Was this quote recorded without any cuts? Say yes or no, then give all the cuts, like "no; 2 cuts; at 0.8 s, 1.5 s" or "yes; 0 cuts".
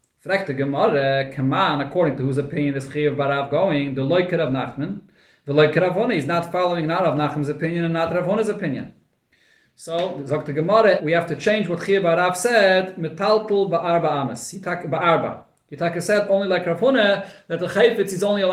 no; 1 cut; at 11.0 s